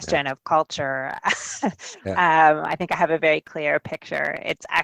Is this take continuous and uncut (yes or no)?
yes